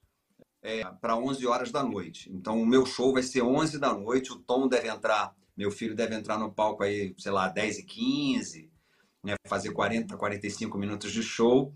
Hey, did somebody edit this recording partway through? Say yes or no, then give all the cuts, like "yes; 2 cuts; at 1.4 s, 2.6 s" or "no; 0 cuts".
no; 0 cuts